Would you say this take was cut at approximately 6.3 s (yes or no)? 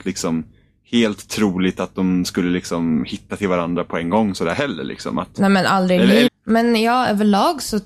yes